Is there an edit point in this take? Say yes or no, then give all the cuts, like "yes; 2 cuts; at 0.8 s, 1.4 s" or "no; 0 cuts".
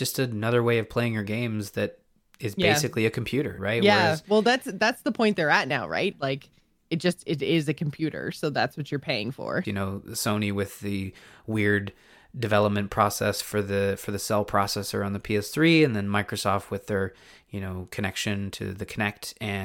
yes; 3 cuts; at 3.6 s, 6.1 s, 9.6 s